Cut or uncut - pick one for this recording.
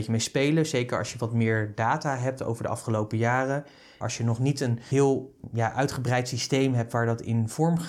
cut